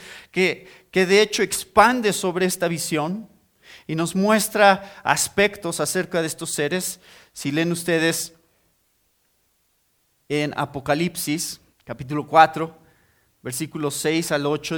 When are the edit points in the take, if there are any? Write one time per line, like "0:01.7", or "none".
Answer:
0:11.7